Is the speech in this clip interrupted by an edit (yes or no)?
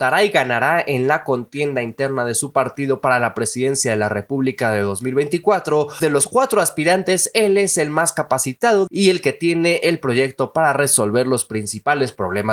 yes